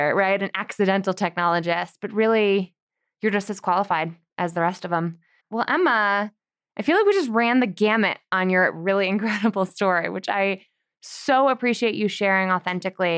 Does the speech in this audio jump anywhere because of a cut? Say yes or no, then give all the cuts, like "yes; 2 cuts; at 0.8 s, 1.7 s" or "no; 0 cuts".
yes; 1 cut; at 5.4 s